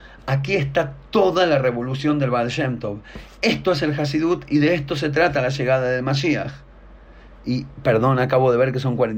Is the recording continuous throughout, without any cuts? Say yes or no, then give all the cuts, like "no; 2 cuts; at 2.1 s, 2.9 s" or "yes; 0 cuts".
yes; 0 cuts